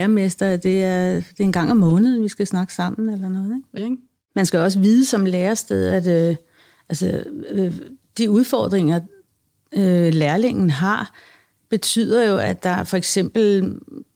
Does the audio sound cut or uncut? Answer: cut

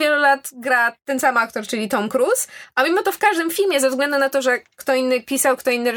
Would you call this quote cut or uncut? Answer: uncut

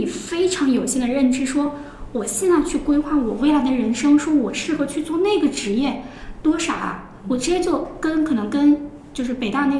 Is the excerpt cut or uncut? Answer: uncut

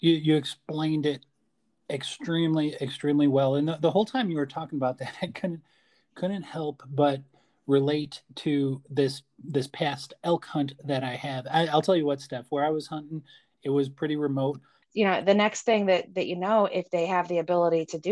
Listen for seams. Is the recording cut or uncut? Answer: cut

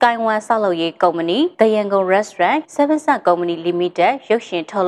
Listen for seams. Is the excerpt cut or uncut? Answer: cut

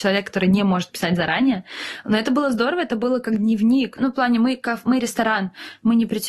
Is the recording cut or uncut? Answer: cut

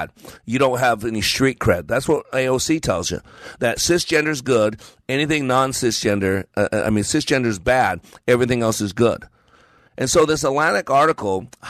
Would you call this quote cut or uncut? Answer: uncut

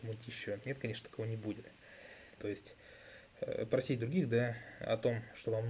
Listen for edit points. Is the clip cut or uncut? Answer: cut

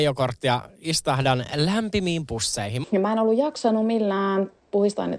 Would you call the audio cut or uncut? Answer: cut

